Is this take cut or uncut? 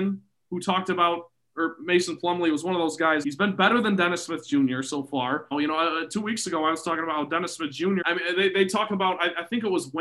cut